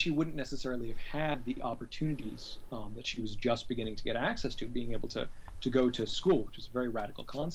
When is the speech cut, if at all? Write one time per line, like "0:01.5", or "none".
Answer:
none